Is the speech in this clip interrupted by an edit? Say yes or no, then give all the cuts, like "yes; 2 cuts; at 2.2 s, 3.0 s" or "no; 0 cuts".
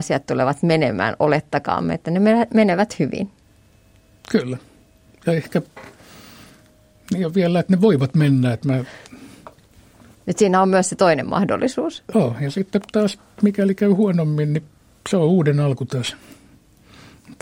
no; 0 cuts